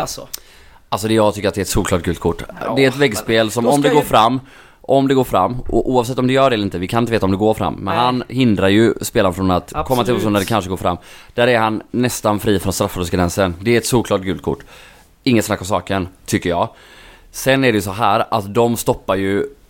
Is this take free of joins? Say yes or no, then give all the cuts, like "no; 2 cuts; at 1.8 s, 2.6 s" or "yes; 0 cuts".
yes; 0 cuts